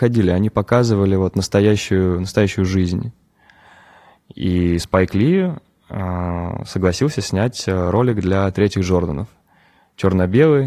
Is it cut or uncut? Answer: uncut